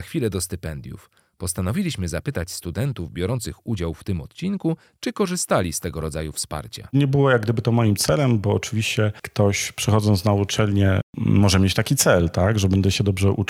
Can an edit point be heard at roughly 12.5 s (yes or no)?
no